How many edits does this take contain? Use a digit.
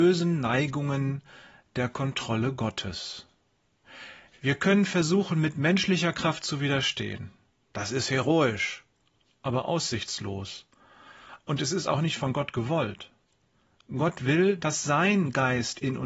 1